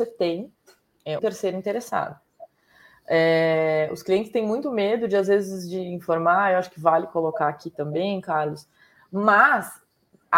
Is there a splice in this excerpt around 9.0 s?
yes; 2 cuts; at 1.2 s, 9.0 s

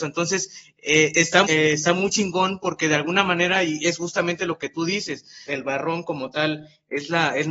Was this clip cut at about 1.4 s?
yes; 2 cuts; at 1.4 s, 5.5 s

